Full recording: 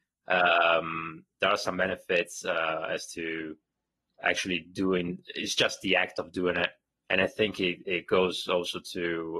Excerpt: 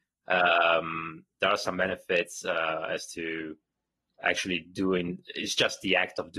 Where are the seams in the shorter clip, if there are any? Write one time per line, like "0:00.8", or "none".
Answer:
none